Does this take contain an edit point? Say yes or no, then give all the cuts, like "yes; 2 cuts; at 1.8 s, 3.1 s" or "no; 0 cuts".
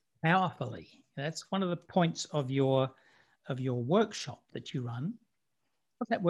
no; 0 cuts